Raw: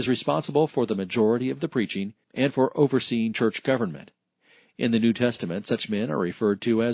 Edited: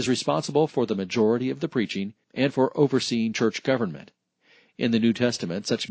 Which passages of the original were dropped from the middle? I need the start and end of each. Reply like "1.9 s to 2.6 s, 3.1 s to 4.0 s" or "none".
none

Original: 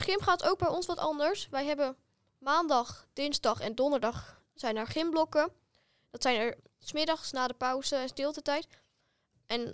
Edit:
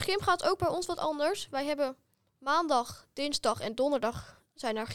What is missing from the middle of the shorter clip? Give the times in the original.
none

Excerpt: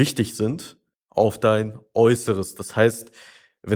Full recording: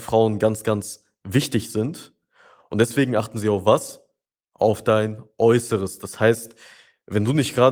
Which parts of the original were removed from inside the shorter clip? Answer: 2.3 s to 4.4 s

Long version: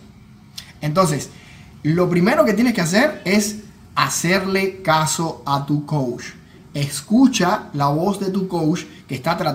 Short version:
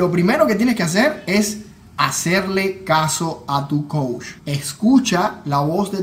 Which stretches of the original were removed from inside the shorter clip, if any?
6.4 s to 6.7 s

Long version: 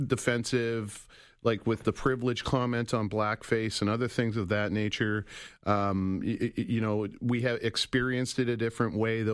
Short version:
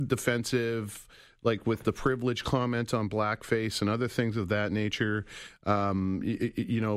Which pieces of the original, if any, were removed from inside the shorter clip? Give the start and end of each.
none

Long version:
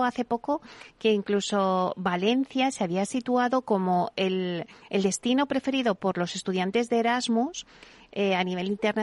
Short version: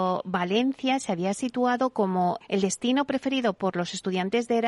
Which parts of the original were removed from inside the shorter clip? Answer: 4.1 s to 4.8 s

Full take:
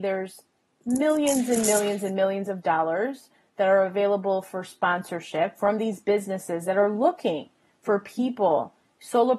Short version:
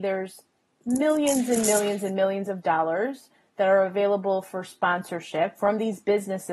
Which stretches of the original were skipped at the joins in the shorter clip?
none

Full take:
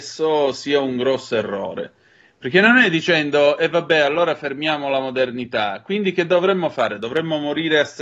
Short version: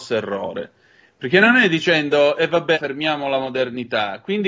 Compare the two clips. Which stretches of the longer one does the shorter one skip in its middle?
3.9 s to 4.3 s

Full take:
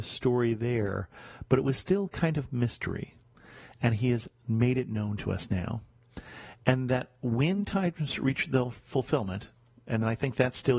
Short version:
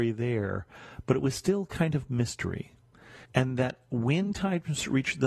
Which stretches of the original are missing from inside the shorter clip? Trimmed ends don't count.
3.7 s to 6.6 s

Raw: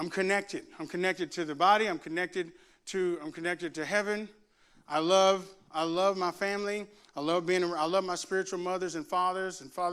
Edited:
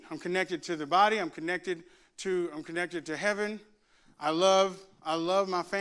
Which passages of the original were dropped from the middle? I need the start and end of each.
none

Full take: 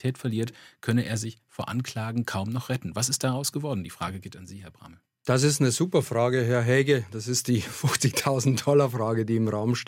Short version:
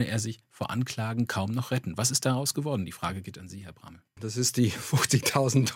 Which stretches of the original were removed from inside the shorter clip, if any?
5.1 s to 7.1 s

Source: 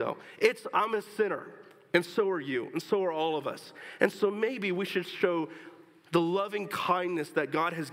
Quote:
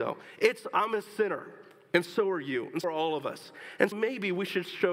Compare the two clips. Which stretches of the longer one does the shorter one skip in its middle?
2.8 s to 3.0 s, 4.1 s to 4.3 s

